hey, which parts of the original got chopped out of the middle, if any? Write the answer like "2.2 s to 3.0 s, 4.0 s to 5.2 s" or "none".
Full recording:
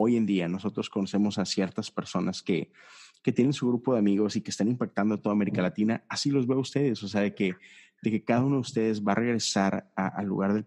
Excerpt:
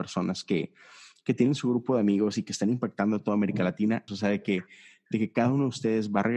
6.1 s to 7.0 s

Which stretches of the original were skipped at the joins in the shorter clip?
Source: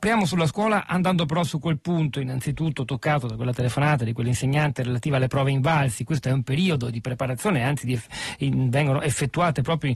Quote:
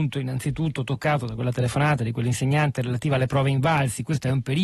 none

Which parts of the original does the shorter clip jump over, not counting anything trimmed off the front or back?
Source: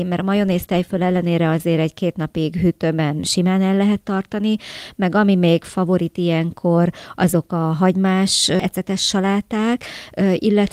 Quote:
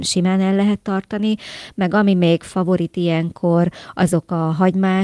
none

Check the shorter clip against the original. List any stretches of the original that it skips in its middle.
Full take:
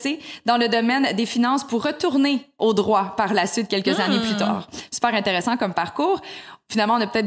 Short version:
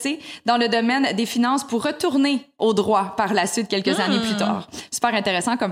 none

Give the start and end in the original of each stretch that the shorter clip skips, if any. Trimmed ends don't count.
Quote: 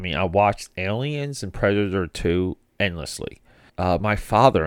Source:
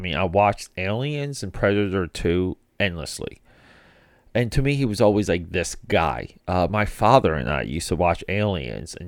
3.7 s to 6.4 s

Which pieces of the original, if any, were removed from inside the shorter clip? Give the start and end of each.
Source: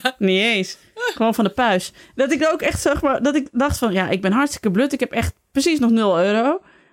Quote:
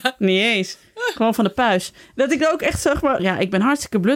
3.2 s to 3.9 s

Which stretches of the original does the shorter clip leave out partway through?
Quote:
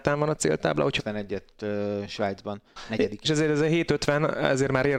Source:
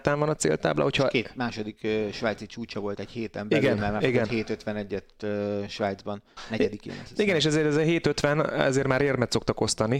1.0 s to 4.6 s, 6.8 s to 7.4 s

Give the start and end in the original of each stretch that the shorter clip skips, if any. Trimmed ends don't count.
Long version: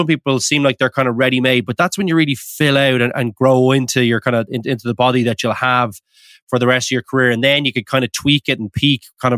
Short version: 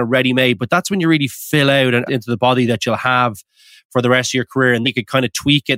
3.1 s to 4.6 s, 7.4 s to 7.6 s

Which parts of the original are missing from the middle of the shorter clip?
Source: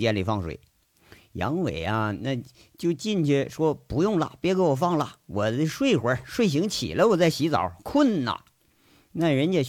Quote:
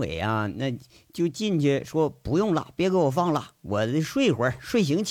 none

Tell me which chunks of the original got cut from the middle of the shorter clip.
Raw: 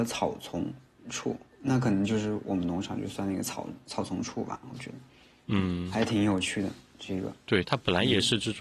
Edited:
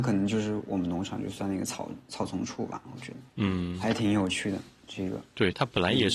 5.1 s to 5.4 s

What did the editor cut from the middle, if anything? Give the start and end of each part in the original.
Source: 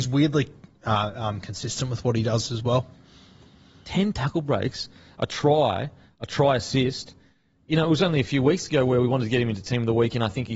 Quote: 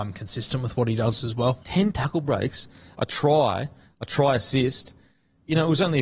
2.9 s to 3.8 s

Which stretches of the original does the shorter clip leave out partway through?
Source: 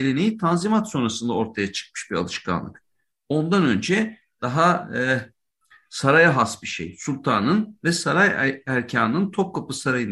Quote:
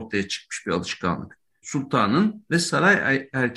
3.1 s to 7.0 s

